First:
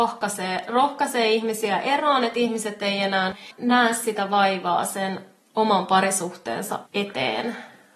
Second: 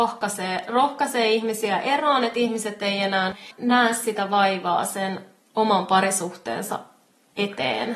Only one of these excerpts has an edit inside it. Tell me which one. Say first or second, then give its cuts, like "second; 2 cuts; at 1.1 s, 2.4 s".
first; 1 cut; at 6.9 s